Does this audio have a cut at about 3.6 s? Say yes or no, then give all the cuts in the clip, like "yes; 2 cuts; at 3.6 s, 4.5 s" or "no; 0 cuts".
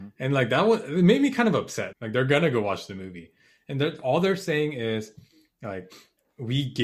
no; 1 cut; at 1.9 s